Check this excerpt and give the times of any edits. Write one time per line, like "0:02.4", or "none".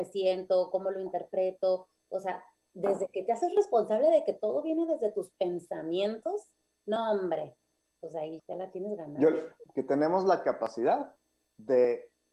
0:08.4
0:09.7